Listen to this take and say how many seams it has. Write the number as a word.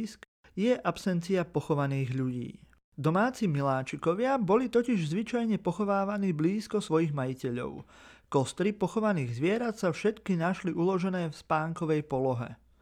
zero